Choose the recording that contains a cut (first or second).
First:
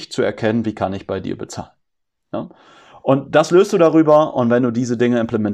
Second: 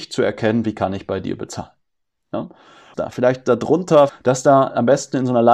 second